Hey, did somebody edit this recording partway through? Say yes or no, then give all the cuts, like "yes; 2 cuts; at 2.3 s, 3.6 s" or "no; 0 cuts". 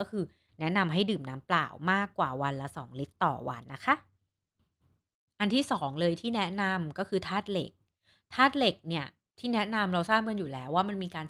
yes; 1 cut; at 3.6 s